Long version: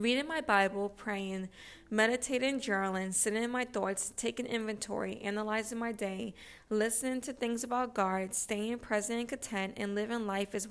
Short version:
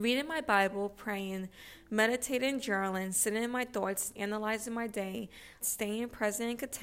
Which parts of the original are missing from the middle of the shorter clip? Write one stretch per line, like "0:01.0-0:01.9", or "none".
0:04.1-0:05.2
0:06.7-0:08.3